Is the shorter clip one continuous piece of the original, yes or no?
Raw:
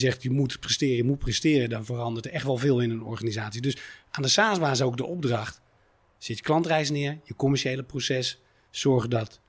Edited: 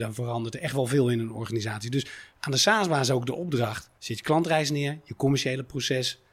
no